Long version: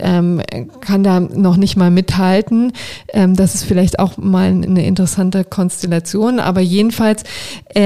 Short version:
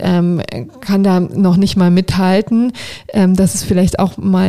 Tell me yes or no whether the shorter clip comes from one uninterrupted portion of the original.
yes